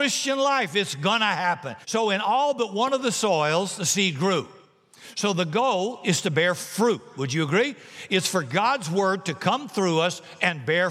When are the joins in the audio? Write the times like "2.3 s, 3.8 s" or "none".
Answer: 1.8 s